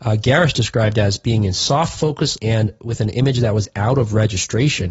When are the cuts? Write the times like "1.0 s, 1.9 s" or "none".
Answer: 2.4 s

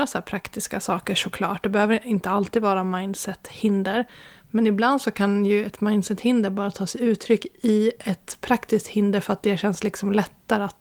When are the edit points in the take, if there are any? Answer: none

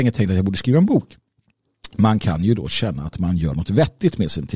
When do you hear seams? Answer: none

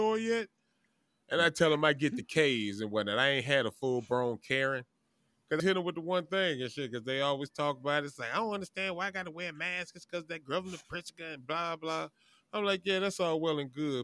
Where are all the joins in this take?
5.6 s

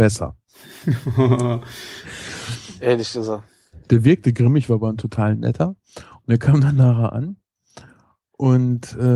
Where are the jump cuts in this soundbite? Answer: 3.9 s

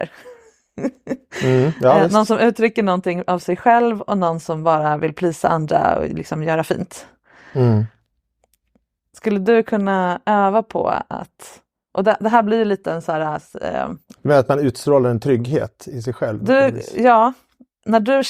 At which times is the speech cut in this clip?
none

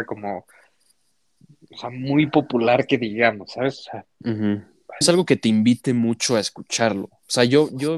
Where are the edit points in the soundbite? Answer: 5.0 s

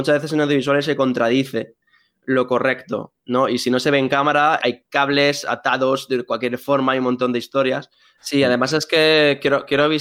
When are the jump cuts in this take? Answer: 4.6 s, 8.2 s

